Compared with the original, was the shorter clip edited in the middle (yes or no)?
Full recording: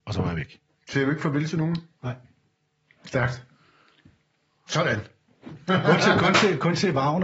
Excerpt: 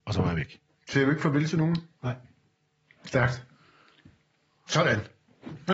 no